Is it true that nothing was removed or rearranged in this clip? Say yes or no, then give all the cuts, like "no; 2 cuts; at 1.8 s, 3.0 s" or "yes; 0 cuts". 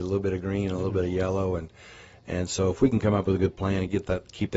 yes; 0 cuts